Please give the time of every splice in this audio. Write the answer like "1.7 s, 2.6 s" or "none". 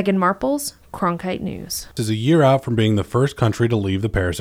2.0 s